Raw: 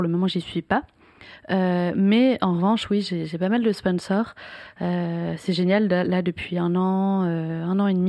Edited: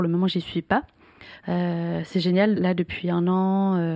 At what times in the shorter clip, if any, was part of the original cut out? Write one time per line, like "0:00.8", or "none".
0:01.4
0:02.6